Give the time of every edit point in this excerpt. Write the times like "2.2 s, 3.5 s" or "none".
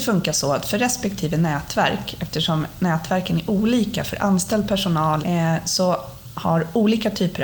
5.2 s